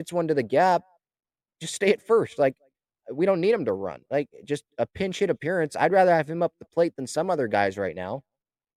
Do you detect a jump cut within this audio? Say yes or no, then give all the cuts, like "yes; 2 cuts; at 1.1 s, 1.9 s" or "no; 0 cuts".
no; 0 cuts